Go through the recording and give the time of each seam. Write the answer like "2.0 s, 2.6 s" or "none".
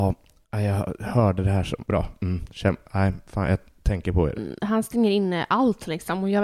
1.8 s, 4.4 s